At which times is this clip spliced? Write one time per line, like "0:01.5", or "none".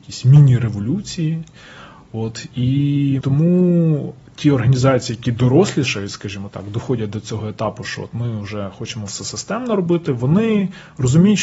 0:03.2